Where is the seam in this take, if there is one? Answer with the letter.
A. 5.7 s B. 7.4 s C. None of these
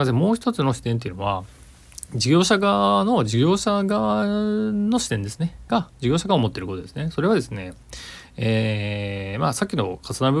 A